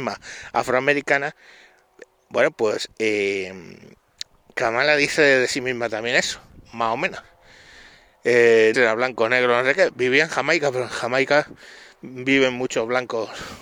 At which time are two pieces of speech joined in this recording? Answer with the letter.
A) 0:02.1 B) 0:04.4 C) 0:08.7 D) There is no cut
C